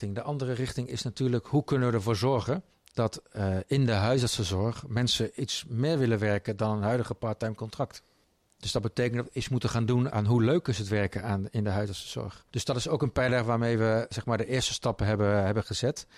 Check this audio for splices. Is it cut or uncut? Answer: cut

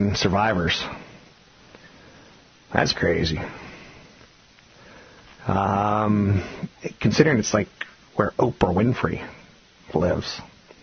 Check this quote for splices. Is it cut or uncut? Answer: cut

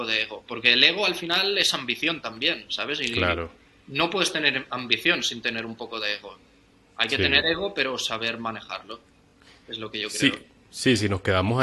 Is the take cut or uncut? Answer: uncut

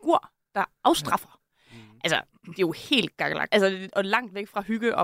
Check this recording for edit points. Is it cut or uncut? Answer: cut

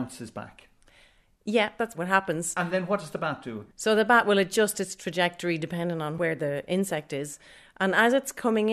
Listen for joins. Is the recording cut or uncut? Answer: cut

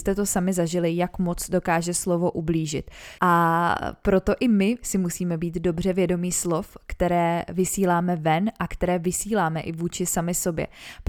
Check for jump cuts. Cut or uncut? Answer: cut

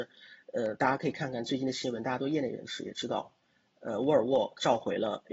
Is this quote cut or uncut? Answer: uncut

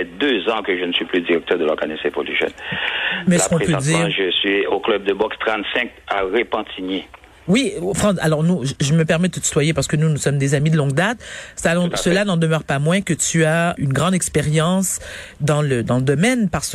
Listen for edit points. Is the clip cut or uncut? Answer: cut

